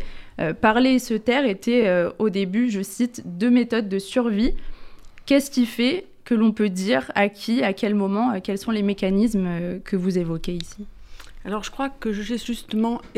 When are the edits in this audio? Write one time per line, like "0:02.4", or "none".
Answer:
none